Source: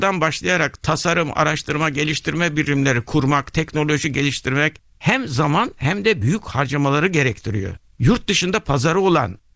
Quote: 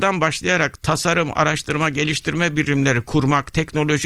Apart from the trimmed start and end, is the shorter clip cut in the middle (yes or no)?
no